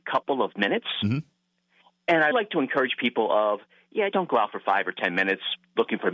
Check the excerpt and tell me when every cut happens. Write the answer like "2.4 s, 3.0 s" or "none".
2.3 s, 4.1 s